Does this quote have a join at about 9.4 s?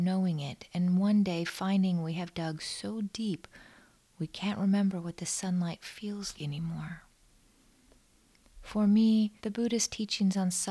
yes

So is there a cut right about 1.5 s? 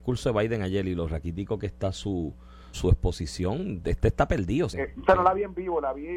no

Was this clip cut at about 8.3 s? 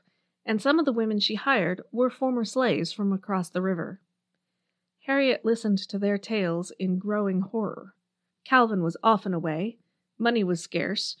yes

